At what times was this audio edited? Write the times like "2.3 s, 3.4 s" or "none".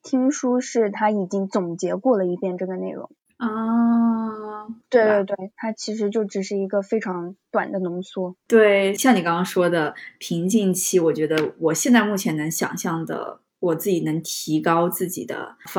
4.8 s, 9.0 s